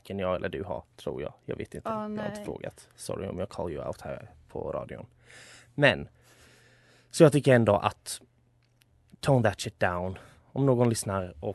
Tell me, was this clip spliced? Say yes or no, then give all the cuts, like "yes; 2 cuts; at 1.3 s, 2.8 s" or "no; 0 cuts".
no; 0 cuts